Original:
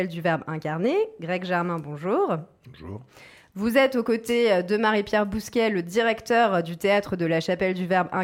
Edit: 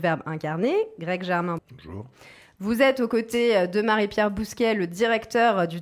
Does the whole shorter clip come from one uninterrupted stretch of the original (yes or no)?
no